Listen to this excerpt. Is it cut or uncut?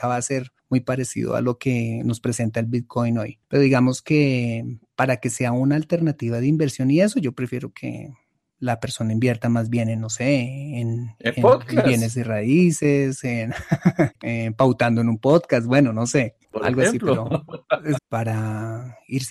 cut